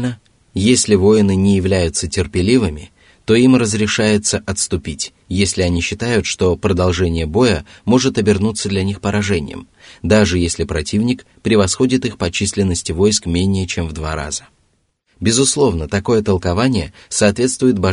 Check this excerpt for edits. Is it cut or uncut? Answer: uncut